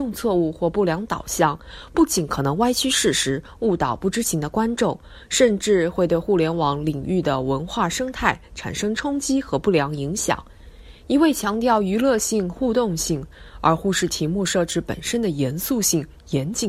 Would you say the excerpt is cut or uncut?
uncut